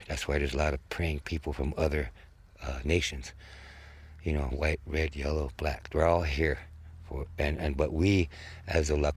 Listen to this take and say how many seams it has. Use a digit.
0